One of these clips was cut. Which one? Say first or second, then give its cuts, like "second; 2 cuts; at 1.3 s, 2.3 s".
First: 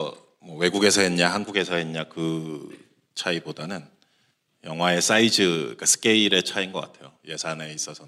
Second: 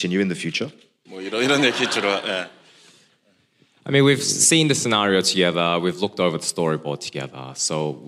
second; 1 cut; at 1.1 s